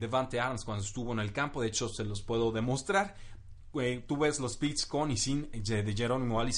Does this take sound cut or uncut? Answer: uncut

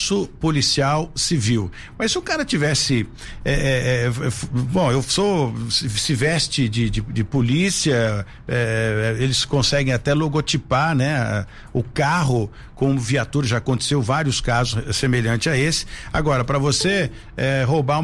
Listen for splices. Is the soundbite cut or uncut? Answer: uncut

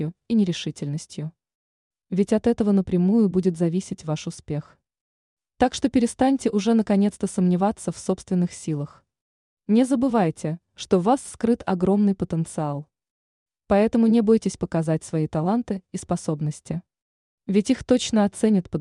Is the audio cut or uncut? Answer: uncut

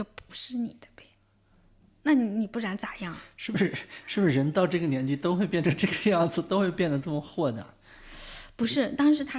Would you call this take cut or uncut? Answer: uncut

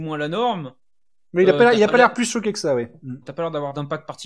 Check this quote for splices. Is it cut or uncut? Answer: cut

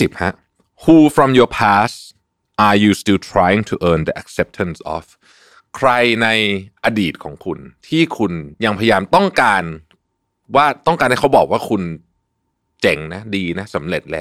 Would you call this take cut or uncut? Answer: uncut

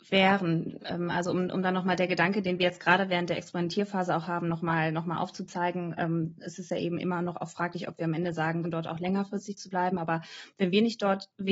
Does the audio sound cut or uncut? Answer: cut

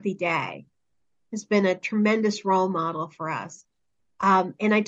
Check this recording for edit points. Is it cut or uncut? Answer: uncut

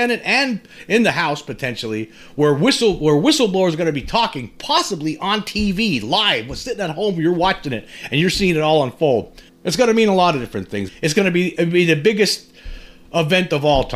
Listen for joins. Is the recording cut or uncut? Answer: cut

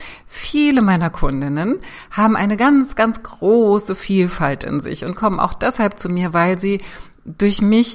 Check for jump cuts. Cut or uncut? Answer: uncut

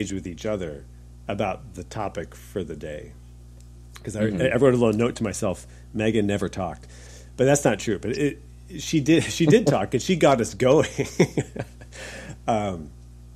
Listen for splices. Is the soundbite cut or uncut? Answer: uncut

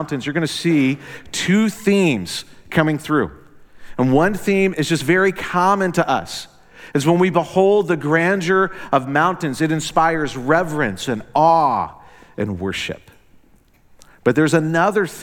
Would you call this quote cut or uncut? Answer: uncut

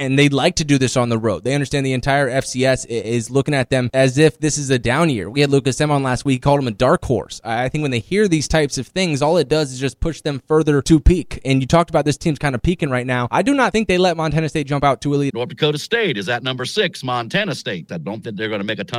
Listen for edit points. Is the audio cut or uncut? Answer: cut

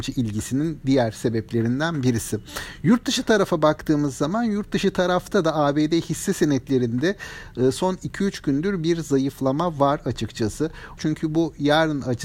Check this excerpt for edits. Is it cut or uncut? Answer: cut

